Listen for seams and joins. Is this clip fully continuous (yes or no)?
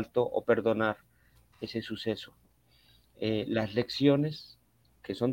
yes